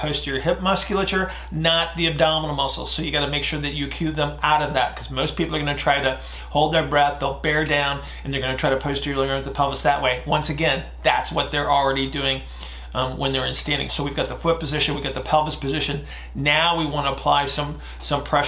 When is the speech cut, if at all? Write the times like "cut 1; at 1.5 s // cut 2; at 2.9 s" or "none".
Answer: cut 1; at 13.9 s

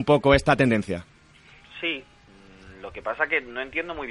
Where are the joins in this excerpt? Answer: none

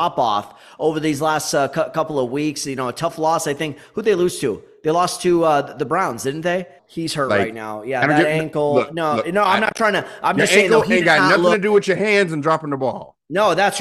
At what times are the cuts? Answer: cut 1; at 6.8 s

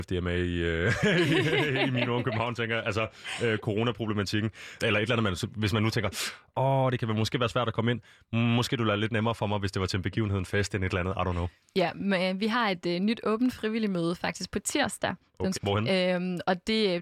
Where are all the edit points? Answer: cut 1; at 4.8 s // cut 2; at 15.5 s

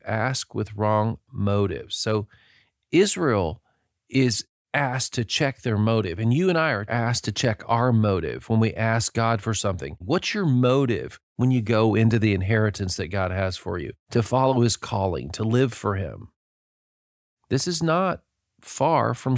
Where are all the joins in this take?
cut 1; at 10.0 s // cut 2; at 17.3 s

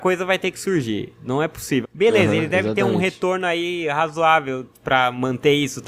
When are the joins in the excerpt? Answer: cut 1; at 1.8 s

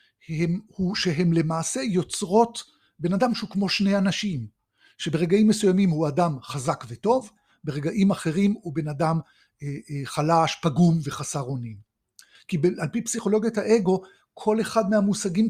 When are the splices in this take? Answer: cut 1; at 12.4 s

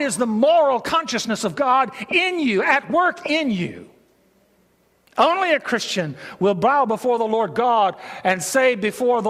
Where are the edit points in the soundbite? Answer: cut 1; at 5.0 s

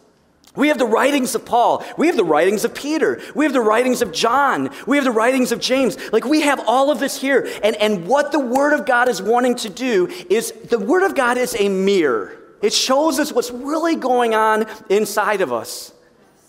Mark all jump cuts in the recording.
cut 1; at 12.6 s

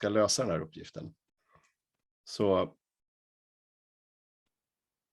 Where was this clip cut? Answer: cut 1; at 2.0 s

